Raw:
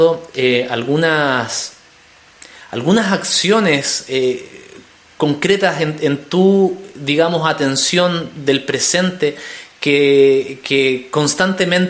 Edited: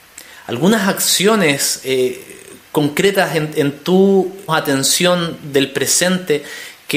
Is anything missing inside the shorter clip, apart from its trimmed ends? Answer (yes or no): yes